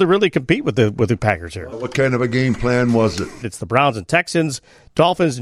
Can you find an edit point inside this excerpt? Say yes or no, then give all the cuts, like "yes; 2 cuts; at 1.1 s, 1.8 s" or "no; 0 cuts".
yes; 2 cuts; at 1.7 s, 3.4 s